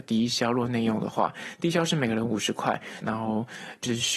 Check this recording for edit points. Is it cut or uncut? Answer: cut